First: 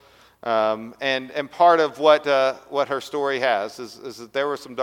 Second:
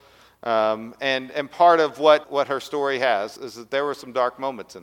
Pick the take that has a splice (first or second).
second